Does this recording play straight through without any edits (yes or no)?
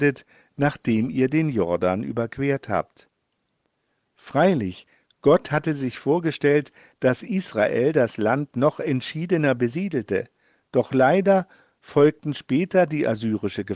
yes